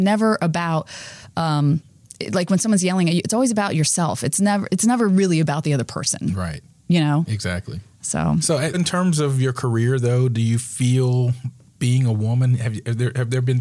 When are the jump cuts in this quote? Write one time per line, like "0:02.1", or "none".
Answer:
0:08.7
0:11.7